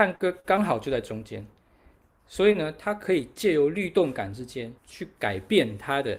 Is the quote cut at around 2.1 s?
no; 1 cut; at 4.8 s

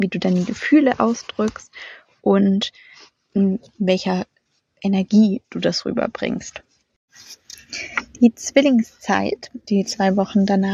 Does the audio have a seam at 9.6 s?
yes; 1 cut; at 9.6 s

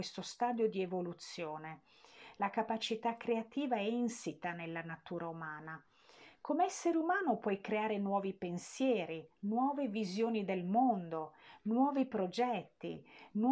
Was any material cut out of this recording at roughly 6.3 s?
no; 0 cuts

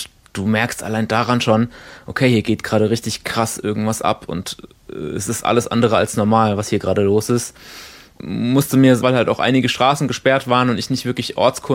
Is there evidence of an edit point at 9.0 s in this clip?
yes; 1 cut; at 9.0 s

